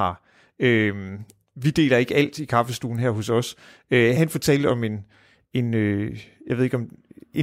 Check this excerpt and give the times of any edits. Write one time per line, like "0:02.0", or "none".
0:04.1